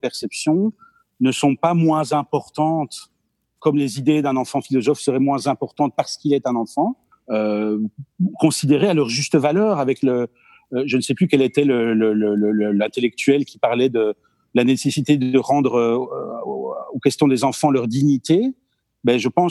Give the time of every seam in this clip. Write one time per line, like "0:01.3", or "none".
0:07.1